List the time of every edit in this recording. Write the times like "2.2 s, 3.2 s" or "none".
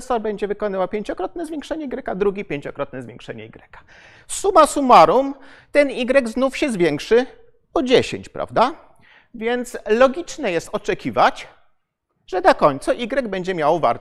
none